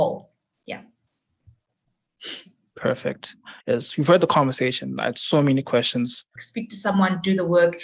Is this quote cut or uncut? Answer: cut